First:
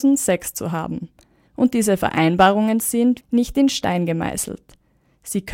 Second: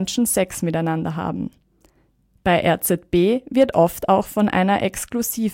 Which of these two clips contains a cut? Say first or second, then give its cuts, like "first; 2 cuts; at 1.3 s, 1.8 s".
first; 2 cuts; at 1.5 s, 3.2 s